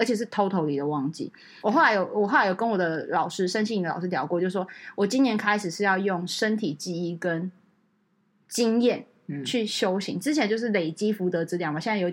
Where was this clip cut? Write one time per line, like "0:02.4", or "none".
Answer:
0:01.6